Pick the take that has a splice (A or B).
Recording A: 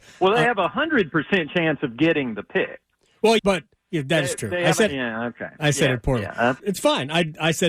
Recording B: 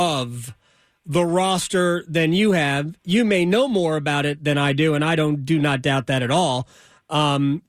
A